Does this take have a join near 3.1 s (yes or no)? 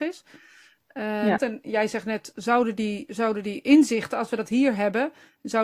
no